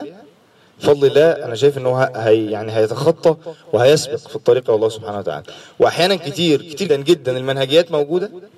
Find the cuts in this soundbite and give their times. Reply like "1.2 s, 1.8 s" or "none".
6.9 s